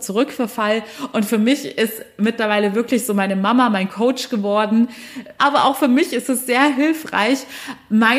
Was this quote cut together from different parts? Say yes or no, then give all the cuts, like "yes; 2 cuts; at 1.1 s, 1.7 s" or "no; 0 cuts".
yes; 1 cut; at 5.4 s